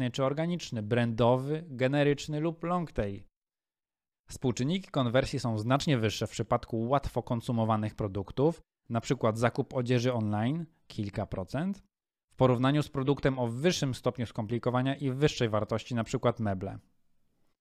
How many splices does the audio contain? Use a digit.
1